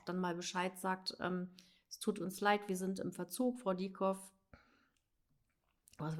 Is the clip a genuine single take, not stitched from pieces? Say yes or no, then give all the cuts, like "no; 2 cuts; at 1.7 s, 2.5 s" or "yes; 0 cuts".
yes; 0 cuts